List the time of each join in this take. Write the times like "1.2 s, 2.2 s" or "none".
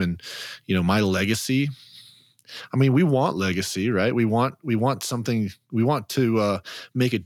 none